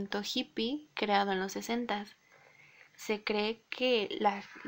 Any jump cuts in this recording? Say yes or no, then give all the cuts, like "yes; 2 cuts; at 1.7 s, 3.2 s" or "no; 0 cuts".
no; 0 cuts